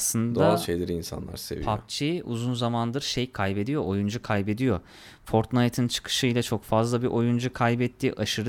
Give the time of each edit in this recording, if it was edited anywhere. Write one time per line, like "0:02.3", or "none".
none

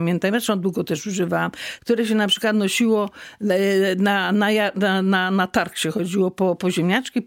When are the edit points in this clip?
0:01.8

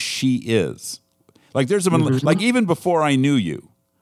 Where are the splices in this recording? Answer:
none

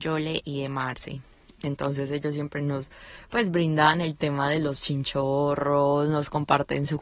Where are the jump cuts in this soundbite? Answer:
none

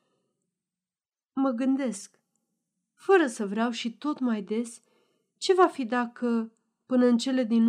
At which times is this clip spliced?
none

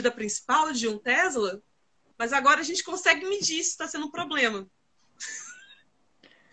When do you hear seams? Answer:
0:02.1

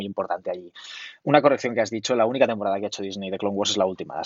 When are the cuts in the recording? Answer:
none

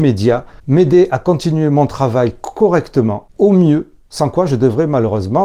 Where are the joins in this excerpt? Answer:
none

